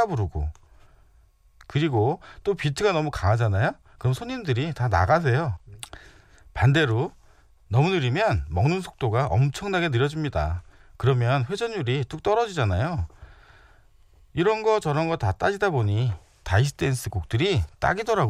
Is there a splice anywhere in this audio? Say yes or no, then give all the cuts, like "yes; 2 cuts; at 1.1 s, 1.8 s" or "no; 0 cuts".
no; 0 cuts